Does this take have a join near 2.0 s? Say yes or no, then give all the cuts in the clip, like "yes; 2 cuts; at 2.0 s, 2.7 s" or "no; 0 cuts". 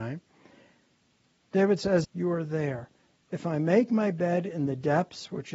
yes; 1 cut; at 2.0 s